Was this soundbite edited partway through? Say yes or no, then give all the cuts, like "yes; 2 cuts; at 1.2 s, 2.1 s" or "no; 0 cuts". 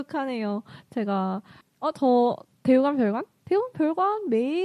yes; 1 cut; at 1.6 s